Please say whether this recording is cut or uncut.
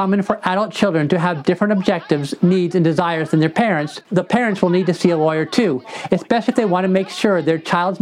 uncut